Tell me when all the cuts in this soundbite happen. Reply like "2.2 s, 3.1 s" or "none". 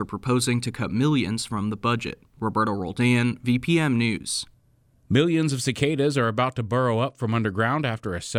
2.3 s